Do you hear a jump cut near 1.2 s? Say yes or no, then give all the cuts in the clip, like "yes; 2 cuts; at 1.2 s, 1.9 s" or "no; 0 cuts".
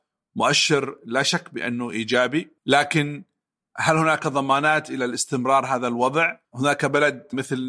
no; 2 cuts; at 2.6 s, 6.4 s